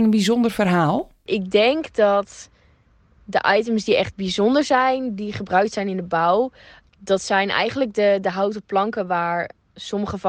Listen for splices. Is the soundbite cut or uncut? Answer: uncut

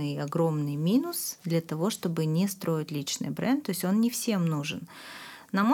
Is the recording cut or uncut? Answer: uncut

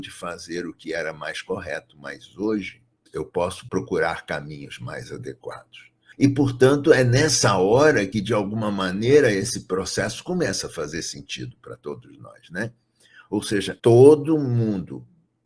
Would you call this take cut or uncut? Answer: uncut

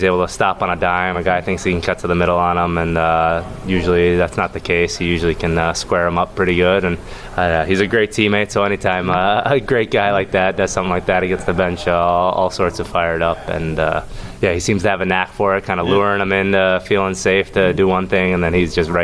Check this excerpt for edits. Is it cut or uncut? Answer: uncut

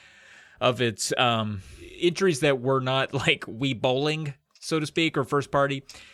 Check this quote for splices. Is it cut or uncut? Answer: uncut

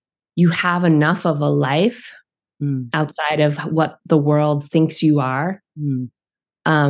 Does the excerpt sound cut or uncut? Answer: uncut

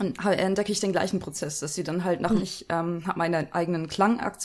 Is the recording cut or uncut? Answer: cut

